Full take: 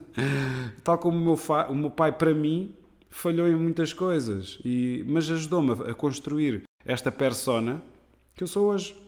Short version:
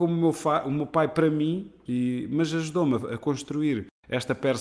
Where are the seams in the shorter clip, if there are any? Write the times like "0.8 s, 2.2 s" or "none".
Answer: 1.9 s